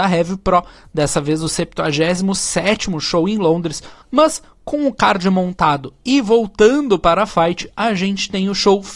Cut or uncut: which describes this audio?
cut